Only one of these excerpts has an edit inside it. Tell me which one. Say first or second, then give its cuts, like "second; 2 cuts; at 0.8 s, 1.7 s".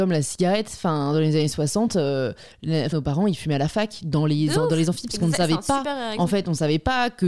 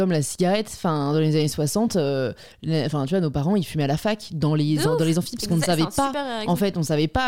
first; 1 cut; at 2.9 s